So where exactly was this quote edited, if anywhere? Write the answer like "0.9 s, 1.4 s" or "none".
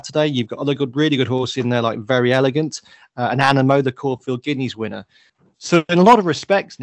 none